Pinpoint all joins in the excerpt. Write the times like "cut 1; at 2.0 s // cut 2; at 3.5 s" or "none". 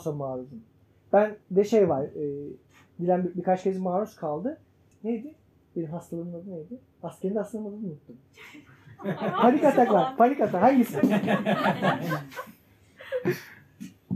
none